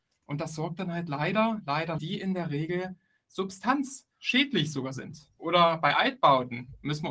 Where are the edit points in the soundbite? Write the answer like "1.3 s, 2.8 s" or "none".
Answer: 2.0 s, 5.4 s

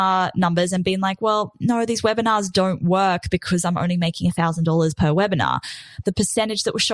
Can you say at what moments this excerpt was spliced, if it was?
6.0 s

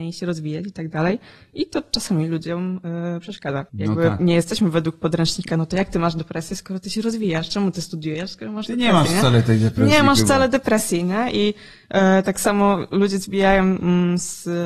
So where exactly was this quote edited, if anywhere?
3.7 s

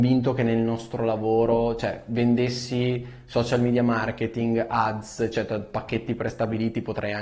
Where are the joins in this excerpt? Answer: none

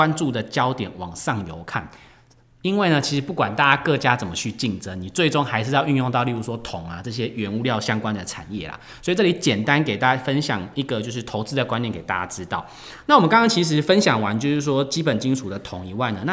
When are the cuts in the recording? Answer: none

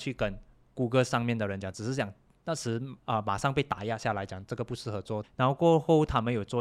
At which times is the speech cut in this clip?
3.0 s, 5.2 s

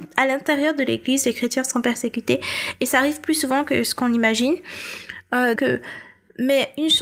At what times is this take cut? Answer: 5.6 s

